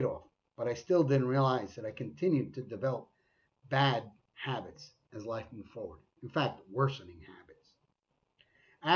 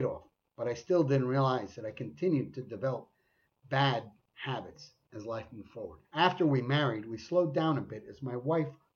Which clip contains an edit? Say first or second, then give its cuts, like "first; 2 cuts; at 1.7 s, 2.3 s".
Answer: second; 1 cut; at 6.0 s